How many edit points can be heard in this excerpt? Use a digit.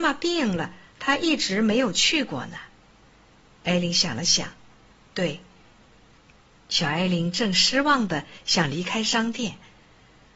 2